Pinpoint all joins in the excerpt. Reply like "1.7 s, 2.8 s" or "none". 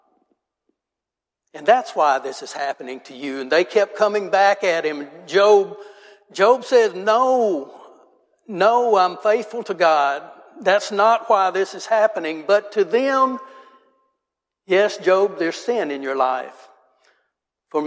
none